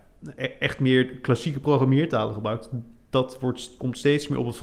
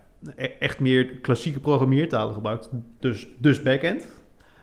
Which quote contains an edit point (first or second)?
second